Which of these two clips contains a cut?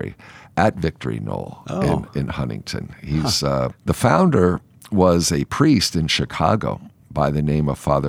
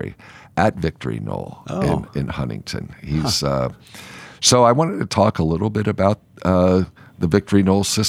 first; 1 cut; at 3.7 s

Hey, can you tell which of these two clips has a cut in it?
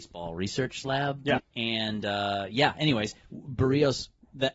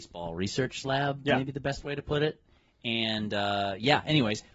first; 1 cut; at 1.4 s

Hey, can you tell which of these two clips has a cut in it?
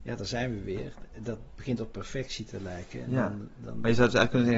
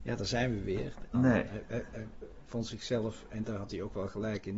second; 1 cut; at 1.1 s

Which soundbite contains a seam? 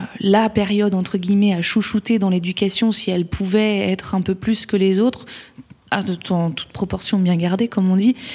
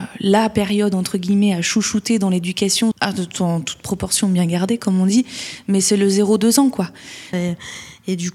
second; 2 cuts; at 2.9 s, 7.3 s

